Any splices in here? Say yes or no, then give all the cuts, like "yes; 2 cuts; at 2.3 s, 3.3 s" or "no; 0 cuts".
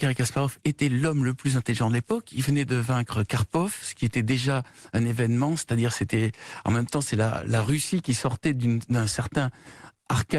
no; 0 cuts